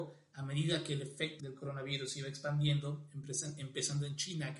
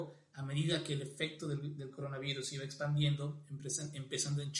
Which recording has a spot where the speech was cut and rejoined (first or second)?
first